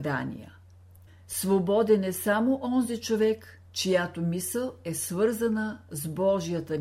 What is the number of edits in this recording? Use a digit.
2